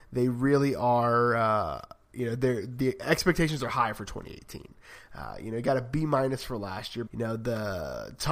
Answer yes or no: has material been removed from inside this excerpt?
yes